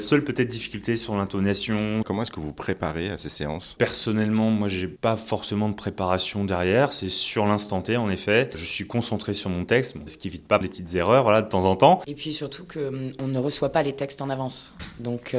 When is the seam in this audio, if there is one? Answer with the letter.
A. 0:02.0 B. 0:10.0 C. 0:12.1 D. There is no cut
A